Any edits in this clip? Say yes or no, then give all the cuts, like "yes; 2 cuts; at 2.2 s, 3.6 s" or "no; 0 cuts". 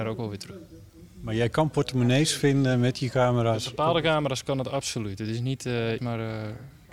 yes; 1 cut; at 6.0 s